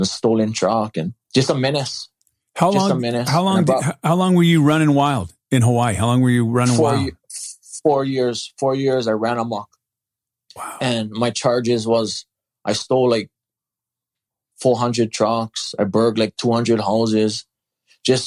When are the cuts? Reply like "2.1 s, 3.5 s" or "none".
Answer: 1.2 s